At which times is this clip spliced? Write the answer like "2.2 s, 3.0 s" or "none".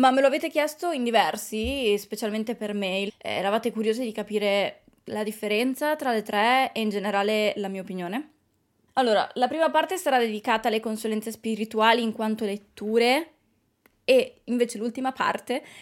3.1 s, 8.9 s